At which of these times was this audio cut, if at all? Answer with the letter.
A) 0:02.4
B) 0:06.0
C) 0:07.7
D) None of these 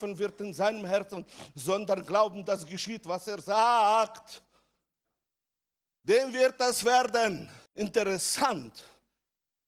C